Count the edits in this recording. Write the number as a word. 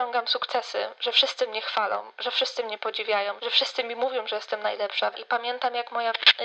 two